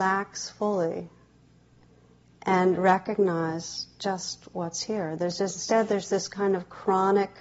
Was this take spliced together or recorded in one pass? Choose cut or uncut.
uncut